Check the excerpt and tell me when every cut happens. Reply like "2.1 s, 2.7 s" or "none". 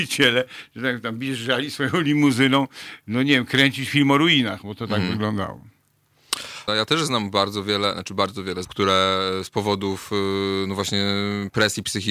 6.7 s, 8.6 s